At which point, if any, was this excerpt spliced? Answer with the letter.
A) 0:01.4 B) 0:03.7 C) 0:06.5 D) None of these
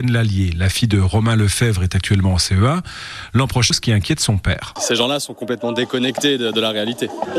B